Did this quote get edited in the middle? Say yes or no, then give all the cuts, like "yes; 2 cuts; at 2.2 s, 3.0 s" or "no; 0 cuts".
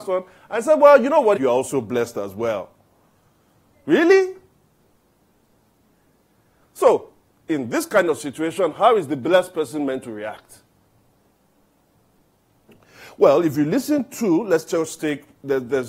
yes; 1 cut; at 1.4 s